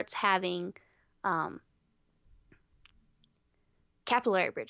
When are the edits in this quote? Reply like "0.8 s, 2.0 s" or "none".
none